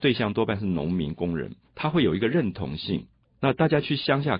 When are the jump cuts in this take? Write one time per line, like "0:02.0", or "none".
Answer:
0:01.6
0:03.2